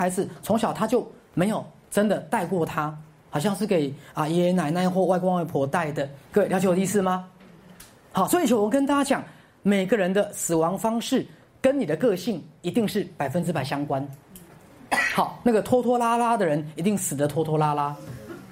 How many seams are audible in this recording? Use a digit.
1